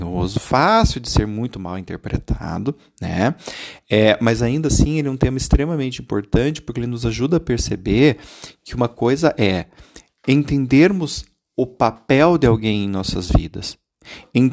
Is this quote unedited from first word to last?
yes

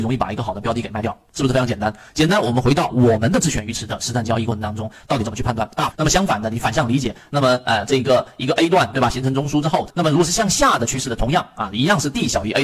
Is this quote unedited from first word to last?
no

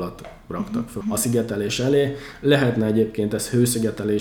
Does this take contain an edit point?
yes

